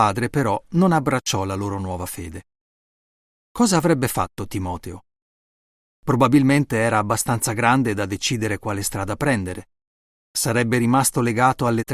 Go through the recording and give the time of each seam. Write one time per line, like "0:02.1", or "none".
0:10.2